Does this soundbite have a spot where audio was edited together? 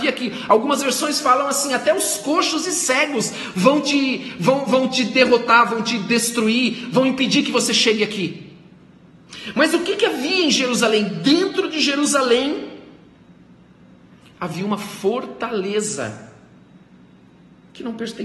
no; 0 cuts

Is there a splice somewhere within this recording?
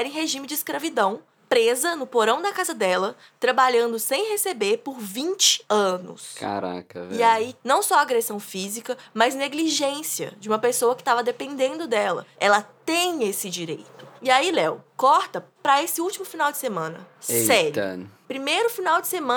yes; 2 cuts; at 7.6 s, 12.3 s

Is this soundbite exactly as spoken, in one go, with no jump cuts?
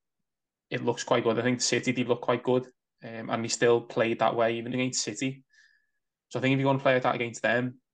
no; 1 cut; at 4.7 s

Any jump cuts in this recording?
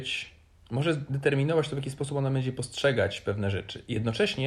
no; 0 cuts

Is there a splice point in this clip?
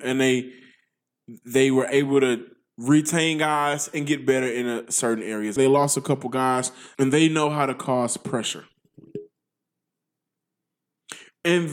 yes; 2 cuts; at 5.6 s, 6.9 s

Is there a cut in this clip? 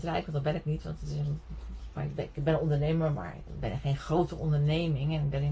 yes; 1 cut; at 2.0 s

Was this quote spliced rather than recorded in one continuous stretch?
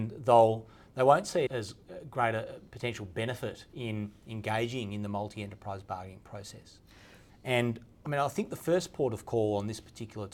yes; 2 cuts; at 1.5 s, 7.3 s

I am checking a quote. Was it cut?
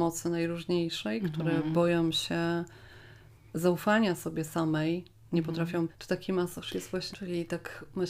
yes; 2 cuts; at 5.9 s, 7.1 s

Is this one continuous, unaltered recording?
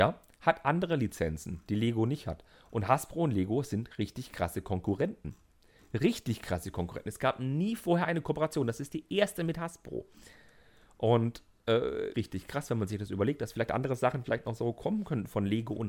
no; 1 cut; at 12.1 s

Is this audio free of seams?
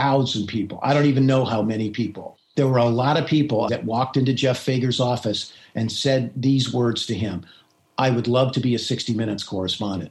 no; 2 cuts; at 2.5 s, 3.7 s

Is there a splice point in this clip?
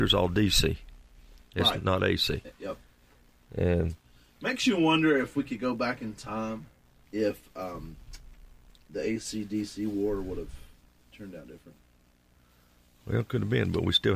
yes; 1 cut; at 7.1 s

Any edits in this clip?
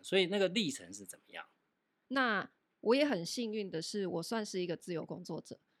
yes; 1 cut; at 2.0 s

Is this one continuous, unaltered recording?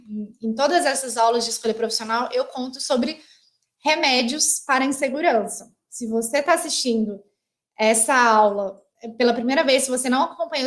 yes; 0 cuts

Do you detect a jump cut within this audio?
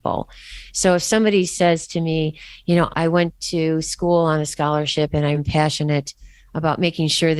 yes; 2 cuts; at 2.9 s, 5.3 s

